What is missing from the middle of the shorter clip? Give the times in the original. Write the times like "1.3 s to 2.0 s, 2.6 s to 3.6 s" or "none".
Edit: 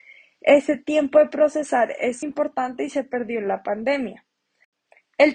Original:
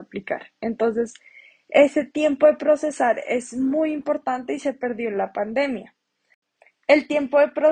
3.5 s to 3.9 s